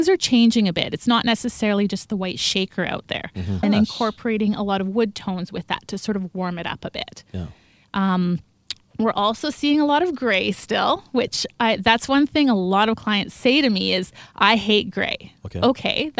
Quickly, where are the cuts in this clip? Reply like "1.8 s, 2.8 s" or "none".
3.6 s